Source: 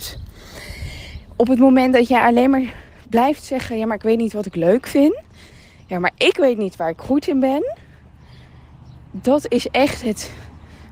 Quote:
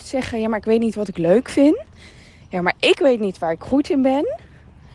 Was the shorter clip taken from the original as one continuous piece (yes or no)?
yes